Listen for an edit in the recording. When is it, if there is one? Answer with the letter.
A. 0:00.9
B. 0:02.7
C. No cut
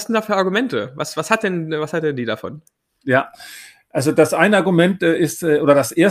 C